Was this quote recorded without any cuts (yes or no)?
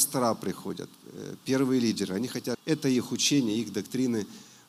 no